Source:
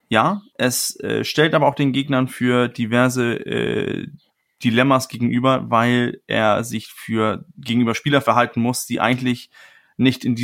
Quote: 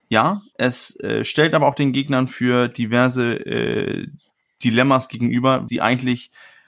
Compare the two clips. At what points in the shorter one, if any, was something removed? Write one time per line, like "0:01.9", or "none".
0:05.7